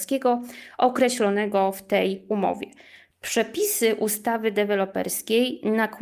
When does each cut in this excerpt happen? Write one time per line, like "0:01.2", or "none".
0:03.1

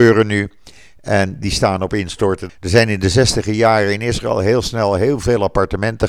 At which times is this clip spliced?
0:02.5

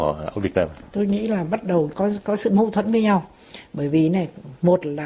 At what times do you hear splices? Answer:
0:01.9

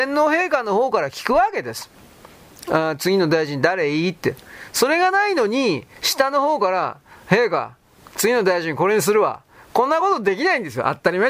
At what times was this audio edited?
none

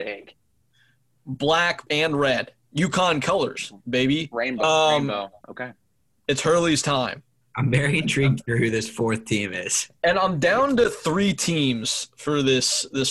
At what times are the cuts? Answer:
0:01.9

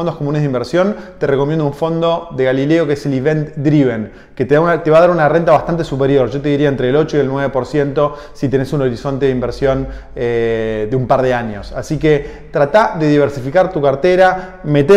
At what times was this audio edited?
none

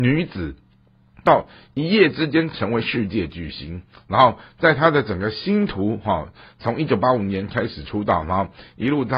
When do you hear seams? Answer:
none

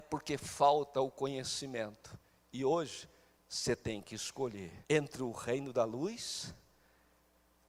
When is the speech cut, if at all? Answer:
0:03.3
0:04.8

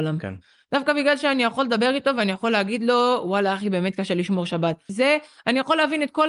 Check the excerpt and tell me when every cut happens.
0:04.9

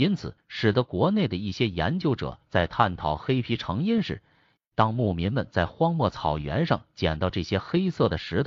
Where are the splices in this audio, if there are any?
0:04.6

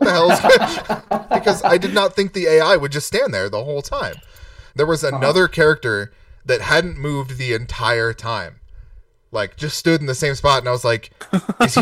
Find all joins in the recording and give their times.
0:04.7

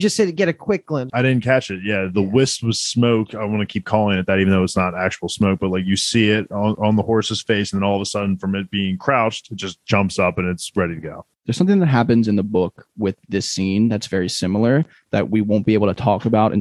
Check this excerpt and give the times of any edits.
0:01.1

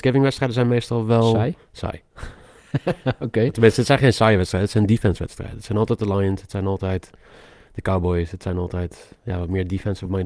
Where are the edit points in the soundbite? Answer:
none

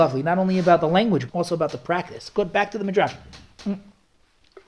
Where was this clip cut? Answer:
0:01.3

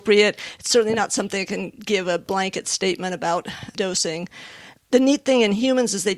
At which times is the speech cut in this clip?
none

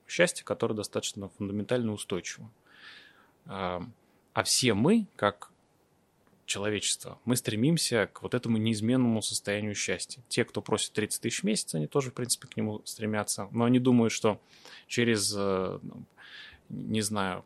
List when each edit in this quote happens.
none

